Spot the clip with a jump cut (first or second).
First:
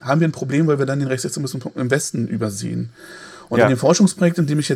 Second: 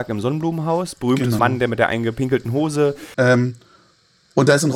second